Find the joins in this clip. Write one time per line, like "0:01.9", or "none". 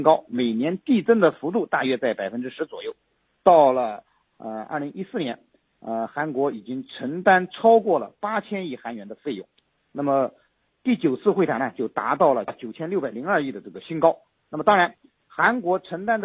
0:10.7